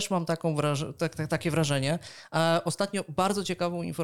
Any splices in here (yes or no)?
no